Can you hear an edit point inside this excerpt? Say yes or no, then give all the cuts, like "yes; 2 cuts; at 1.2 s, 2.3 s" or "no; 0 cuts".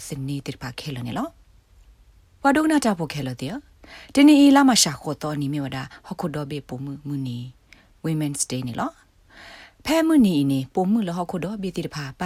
no; 0 cuts